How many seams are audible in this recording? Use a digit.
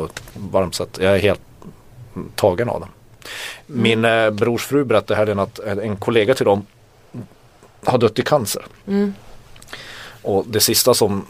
0